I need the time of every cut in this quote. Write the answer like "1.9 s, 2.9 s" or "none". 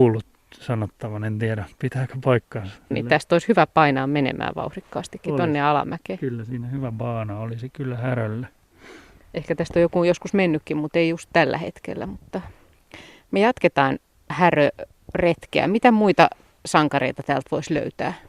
2.9 s